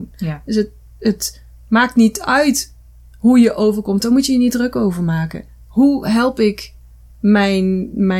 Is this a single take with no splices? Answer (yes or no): yes